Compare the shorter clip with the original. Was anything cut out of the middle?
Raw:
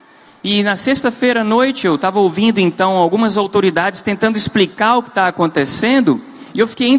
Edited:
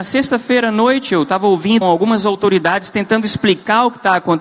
yes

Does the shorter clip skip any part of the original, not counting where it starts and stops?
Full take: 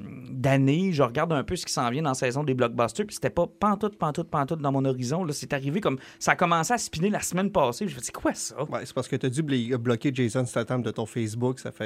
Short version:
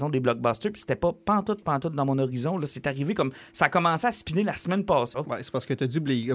yes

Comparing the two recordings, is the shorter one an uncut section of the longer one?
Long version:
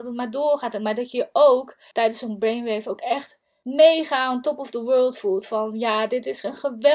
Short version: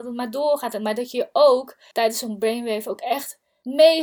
yes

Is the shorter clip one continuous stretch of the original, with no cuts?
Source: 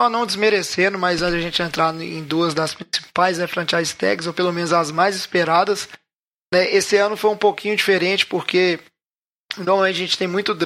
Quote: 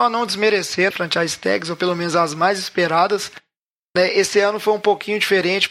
no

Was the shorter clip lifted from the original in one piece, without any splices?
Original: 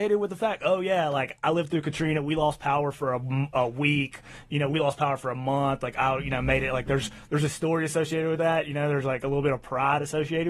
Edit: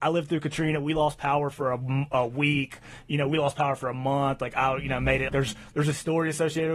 no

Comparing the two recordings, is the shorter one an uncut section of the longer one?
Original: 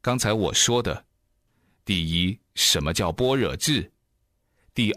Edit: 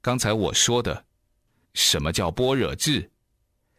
no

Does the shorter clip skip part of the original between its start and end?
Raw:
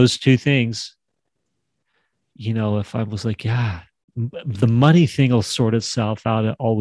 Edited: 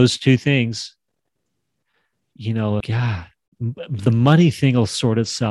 yes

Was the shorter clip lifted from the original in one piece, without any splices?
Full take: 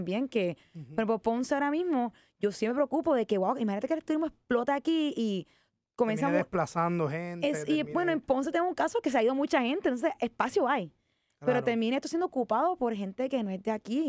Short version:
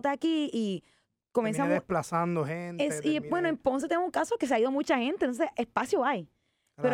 yes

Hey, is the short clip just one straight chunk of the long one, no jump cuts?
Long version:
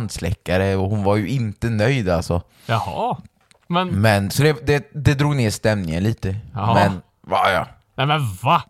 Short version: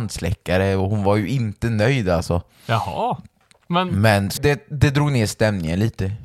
no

